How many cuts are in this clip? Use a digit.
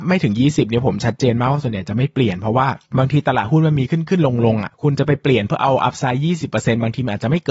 1